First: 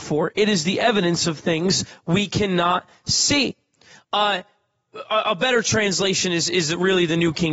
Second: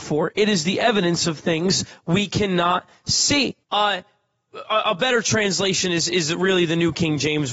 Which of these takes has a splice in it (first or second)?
second